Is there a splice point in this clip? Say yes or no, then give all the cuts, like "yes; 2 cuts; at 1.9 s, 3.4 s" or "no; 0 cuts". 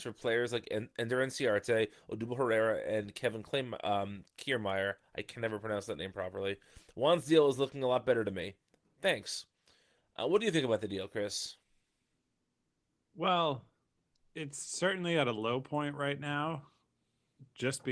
no; 0 cuts